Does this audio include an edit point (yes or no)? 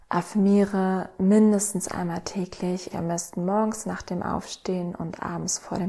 yes